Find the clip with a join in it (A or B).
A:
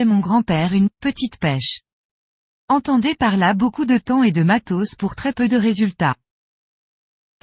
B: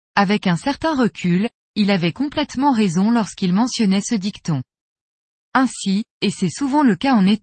B